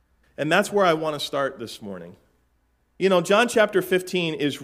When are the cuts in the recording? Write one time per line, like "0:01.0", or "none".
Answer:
none